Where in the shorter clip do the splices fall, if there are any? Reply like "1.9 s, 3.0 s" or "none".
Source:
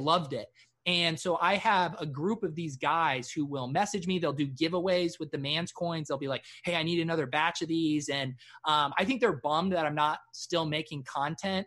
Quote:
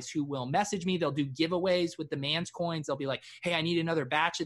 none